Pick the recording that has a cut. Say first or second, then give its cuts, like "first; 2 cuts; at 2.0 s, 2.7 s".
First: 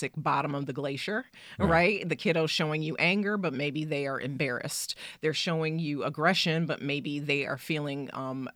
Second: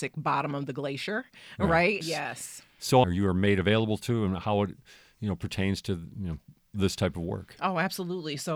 second; 2 cuts; at 2.0 s, 3.0 s